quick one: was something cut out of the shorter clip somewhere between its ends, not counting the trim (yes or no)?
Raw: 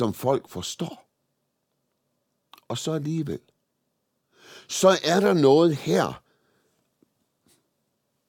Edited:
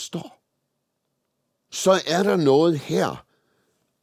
yes